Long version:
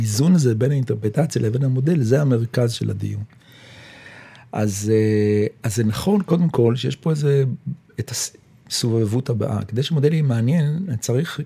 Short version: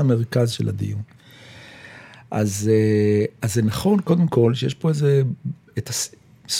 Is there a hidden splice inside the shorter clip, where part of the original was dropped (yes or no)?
no